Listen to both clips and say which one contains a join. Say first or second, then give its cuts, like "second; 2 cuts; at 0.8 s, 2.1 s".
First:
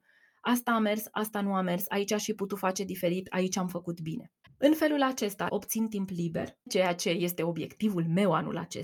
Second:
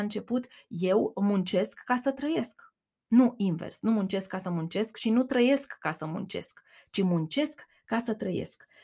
first; 3 cuts; at 4.5 s, 5.5 s, 6.7 s